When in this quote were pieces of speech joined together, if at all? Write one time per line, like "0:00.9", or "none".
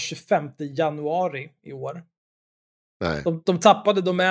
0:02.8